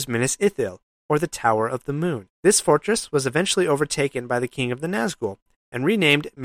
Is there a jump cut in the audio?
yes; 1 cut; at 2.3 s

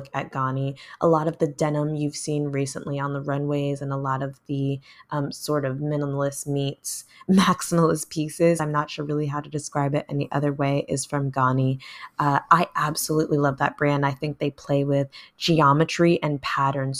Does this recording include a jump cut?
no; 0 cuts

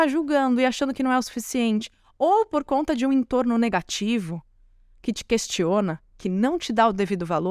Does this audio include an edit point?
no; 0 cuts

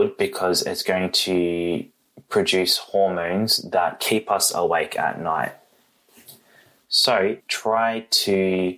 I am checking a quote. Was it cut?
yes; 1 cut; at 7.4 s

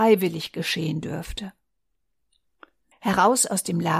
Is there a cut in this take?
yes; 1 cut; at 2.9 s

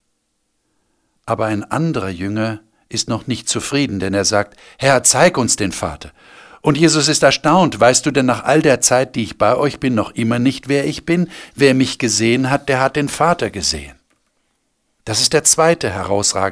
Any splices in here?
no; 0 cuts

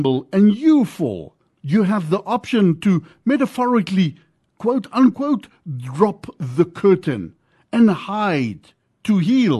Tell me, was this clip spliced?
no; 0 cuts

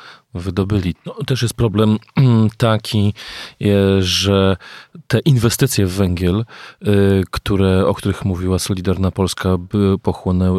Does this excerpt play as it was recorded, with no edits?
no; 1 cut; at 0.9 s

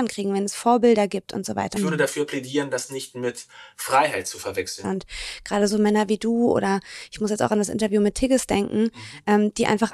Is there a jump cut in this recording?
yes; 2 cuts; at 1.8 s, 4.8 s

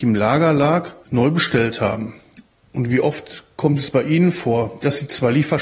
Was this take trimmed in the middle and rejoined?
no; 0 cuts

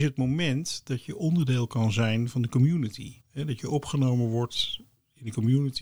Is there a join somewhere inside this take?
yes; 1 cut; at 3.2 s

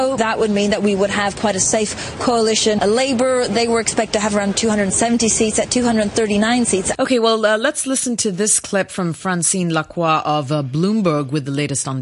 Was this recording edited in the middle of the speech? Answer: yes; 1 cut; at 6.9 s

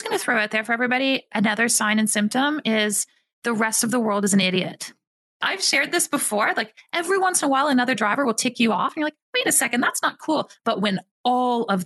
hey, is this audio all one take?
yes; 0 cuts

